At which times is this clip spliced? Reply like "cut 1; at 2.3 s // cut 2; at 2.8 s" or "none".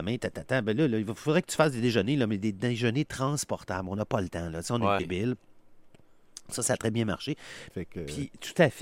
cut 1; at 5.0 s // cut 2; at 7.7 s